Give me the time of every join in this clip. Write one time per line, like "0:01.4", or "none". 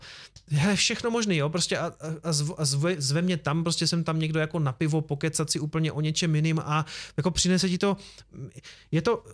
none